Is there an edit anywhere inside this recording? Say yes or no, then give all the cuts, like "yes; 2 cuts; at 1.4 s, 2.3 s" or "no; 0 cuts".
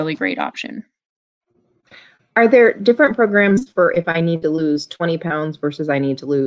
no; 0 cuts